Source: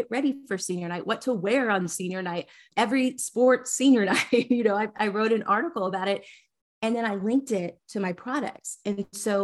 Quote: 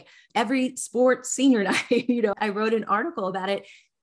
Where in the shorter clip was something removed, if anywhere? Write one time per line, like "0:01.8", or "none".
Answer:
0:02.3